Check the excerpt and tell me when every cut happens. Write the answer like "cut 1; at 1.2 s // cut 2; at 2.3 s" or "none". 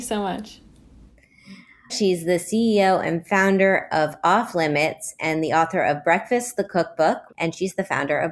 cut 1; at 1.9 s // cut 2; at 7.3 s

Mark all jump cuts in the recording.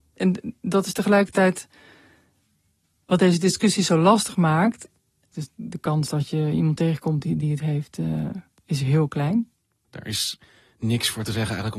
cut 1; at 5.3 s // cut 2; at 9.8 s

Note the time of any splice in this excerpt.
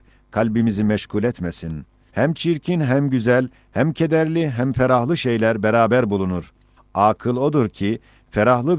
cut 1; at 2.1 s

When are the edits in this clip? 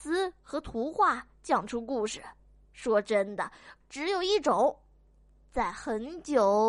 cut 1; at 3.8 s

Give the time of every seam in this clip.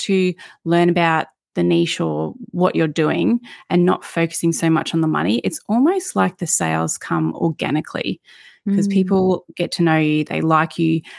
cut 1; at 10.2 s

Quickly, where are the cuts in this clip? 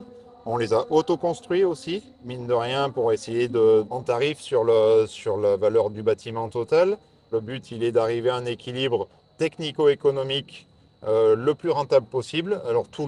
cut 1; at 3.8 s // cut 2; at 7.3 s

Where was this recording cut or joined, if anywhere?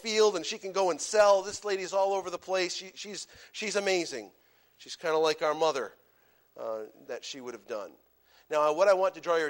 cut 1; at 7.0 s

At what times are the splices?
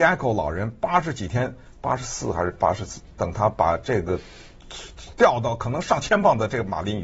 cut 1; at 3.1 s

